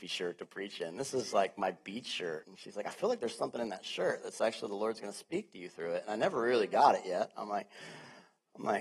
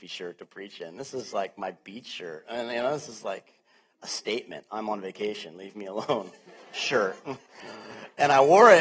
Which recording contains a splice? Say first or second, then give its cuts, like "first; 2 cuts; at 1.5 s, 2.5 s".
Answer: first; 1 cut; at 2.4 s